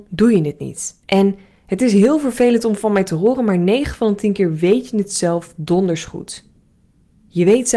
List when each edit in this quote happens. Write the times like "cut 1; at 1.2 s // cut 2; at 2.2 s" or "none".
cut 1; at 1.0 s